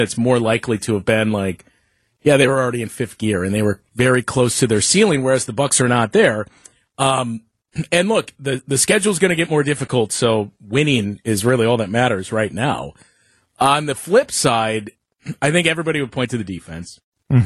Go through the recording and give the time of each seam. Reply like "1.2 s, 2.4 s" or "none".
none